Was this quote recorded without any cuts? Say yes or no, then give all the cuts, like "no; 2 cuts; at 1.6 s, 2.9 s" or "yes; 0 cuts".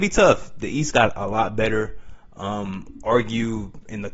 no; 1 cut; at 2.3 s